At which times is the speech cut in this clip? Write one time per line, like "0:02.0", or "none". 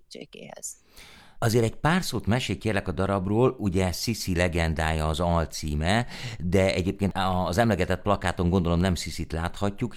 0:01.4